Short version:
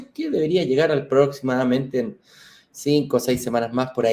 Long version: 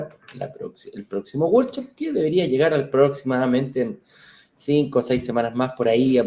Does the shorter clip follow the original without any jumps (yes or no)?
yes